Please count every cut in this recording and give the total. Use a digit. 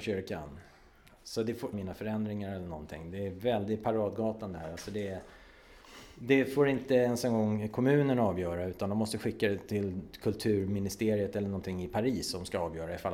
1